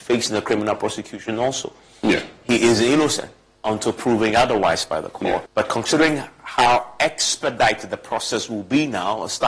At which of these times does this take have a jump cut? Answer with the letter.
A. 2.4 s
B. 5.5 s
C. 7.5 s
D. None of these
B